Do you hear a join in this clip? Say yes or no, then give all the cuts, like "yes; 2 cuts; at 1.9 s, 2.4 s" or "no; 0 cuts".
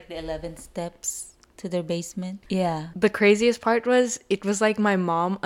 yes; 1 cut; at 2.4 s